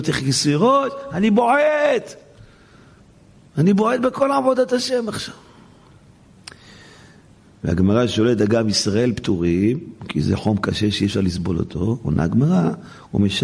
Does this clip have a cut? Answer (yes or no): no